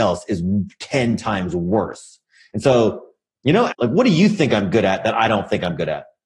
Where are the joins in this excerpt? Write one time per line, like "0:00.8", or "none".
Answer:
0:03.7